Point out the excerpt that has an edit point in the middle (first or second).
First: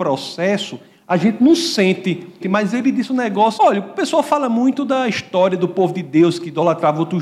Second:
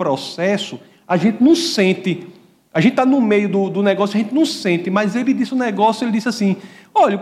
first